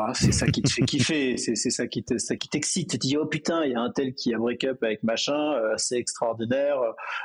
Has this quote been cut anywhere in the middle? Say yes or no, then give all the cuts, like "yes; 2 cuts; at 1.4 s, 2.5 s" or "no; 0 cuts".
no; 0 cuts